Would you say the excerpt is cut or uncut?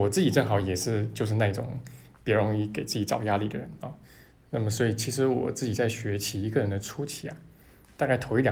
uncut